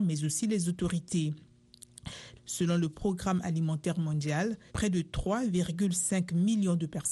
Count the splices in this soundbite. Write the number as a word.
two